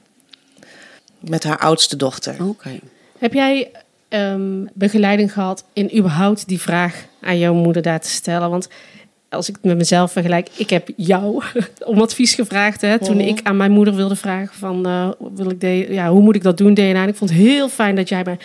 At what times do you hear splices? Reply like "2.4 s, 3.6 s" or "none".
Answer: 1.0 s